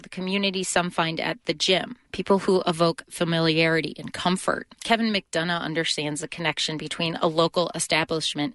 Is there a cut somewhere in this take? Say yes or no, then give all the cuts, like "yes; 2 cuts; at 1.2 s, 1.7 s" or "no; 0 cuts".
yes; 2 cuts; at 2.0 s, 4.7 s